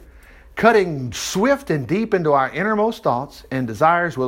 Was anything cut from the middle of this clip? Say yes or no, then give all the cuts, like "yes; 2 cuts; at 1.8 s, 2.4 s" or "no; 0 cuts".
no; 0 cuts